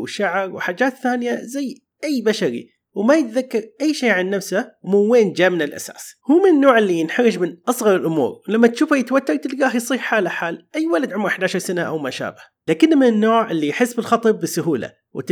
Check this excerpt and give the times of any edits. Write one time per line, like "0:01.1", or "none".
0:06.2
0:12.6